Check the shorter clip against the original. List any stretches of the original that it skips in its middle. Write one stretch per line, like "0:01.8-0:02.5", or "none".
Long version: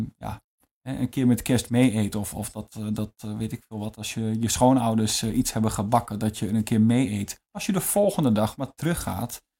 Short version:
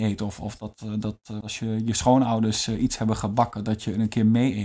0:03.3-0:04.0